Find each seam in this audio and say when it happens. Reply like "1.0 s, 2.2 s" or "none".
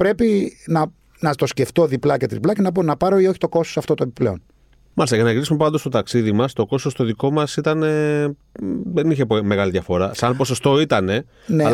none